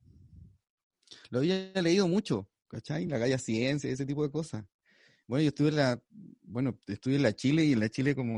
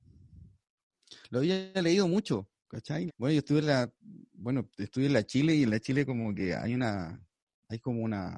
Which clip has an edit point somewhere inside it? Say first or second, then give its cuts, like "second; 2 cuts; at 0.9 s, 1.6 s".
second; 1 cut; at 3.1 s